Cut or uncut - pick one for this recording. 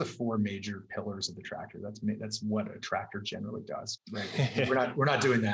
cut